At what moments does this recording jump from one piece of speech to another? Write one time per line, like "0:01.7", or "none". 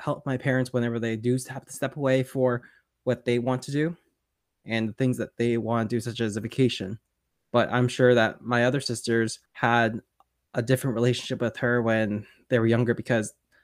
0:07.3
0:09.5